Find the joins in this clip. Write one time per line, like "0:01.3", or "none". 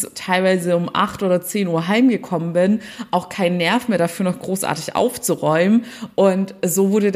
none

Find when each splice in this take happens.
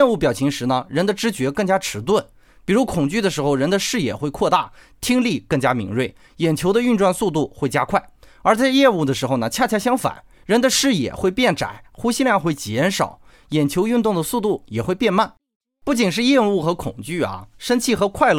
none

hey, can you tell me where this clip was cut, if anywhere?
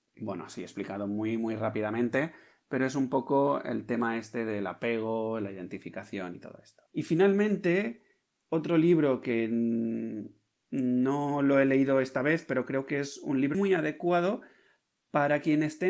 0:06.9
0:13.5

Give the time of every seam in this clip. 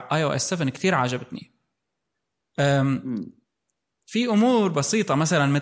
none

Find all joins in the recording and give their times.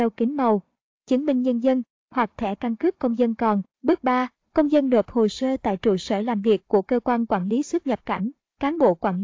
0:03.7

